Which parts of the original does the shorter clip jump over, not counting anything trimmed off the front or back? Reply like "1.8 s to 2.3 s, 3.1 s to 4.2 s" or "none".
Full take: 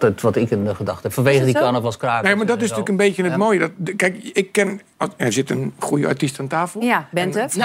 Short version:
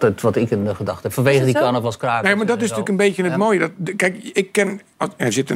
none